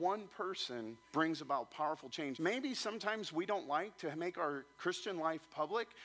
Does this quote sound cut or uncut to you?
cut